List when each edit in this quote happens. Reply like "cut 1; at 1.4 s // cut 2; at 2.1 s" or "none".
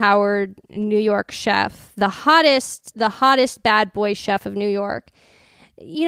none